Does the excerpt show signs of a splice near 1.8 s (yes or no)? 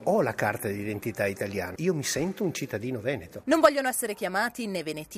yes